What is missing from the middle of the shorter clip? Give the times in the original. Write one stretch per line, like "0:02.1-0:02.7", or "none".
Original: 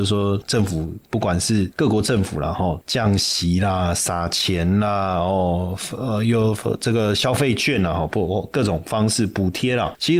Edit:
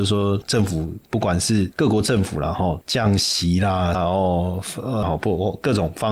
0:03.9-0:05.1
0:06.2-0:07.9